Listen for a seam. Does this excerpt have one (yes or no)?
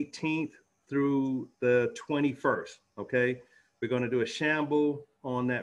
no